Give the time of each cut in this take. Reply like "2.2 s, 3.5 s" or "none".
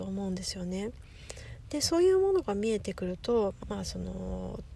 3.6 s